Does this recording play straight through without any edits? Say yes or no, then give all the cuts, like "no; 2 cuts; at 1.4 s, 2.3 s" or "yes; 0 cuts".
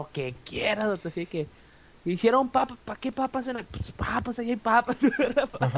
yes; 0 cuts